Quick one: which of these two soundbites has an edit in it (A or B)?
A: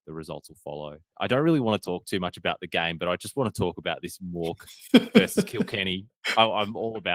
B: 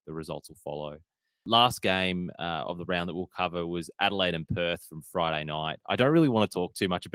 A